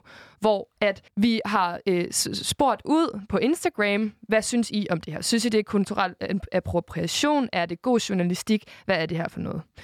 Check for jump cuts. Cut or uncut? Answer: cut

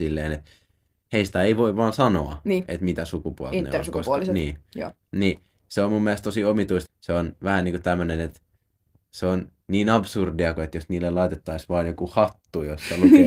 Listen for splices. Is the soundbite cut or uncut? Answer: cut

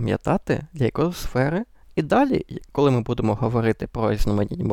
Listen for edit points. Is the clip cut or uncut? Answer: cut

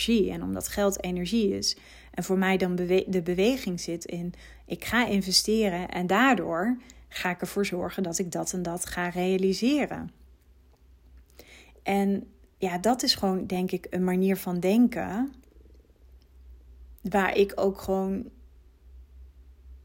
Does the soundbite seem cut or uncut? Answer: cut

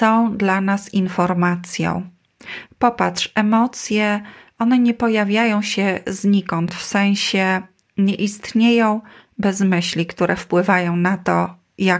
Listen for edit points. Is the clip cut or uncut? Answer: uncut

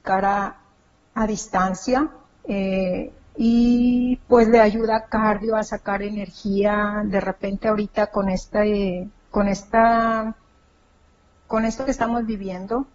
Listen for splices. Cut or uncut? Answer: cut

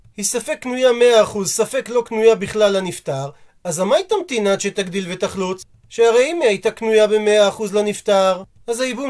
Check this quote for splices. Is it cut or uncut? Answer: cut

